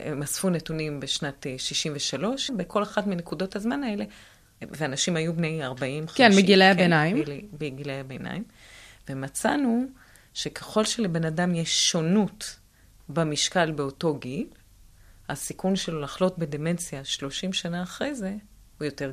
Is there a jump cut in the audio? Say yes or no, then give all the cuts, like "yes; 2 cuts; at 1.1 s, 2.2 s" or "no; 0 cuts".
yes; 1 cut; at 2.5 s